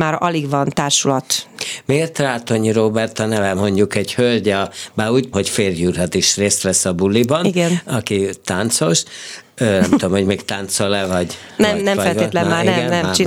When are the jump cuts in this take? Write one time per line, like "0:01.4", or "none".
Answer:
0:05.3